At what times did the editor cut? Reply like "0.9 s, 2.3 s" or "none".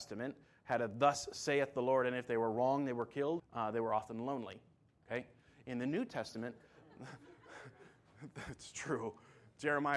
3.4 s